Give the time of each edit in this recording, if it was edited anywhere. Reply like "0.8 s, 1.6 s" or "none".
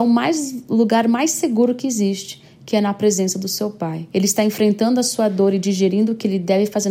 4.1 s